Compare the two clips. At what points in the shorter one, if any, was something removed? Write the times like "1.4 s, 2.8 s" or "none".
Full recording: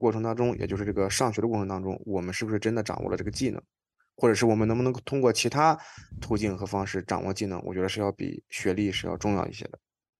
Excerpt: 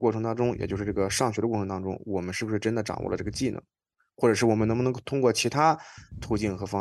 none